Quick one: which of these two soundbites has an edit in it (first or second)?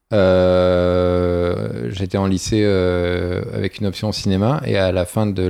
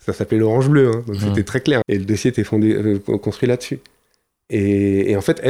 second